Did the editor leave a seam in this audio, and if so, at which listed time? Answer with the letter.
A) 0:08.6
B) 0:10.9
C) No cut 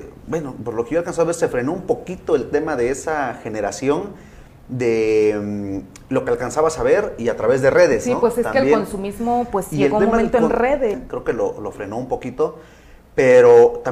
B